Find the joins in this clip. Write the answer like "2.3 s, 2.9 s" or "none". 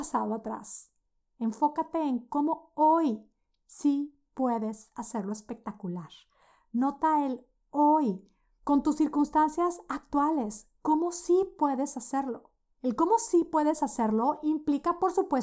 none